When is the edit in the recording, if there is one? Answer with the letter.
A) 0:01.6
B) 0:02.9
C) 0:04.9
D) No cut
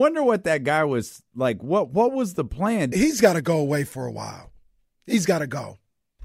B